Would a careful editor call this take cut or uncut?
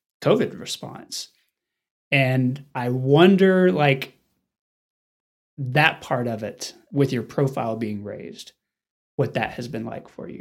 uncut